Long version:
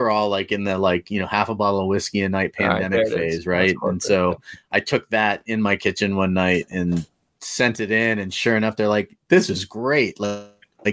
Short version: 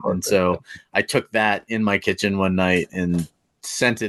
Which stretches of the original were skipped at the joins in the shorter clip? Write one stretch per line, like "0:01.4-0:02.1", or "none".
none